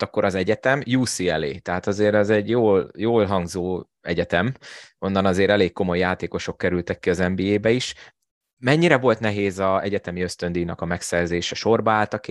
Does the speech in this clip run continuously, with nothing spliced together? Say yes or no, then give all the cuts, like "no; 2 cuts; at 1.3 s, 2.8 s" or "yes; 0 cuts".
yes; 0 cuts